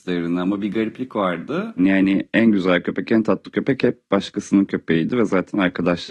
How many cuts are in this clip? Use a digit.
1